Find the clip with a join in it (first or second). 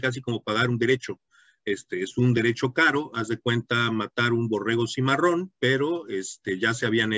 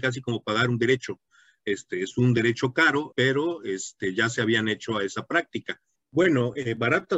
second